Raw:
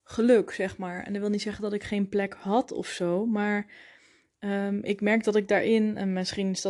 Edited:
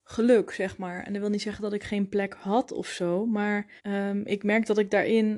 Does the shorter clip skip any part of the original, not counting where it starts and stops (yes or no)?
yes